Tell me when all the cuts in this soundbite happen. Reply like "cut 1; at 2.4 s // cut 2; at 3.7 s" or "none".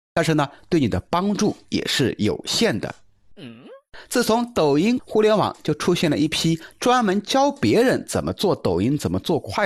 cut 1; at 3.3 s // cut 2; at 5.0 s